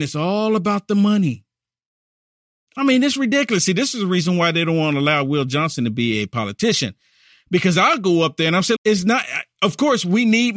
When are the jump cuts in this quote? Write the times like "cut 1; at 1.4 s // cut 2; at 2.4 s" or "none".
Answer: cut 1; at 8.8 s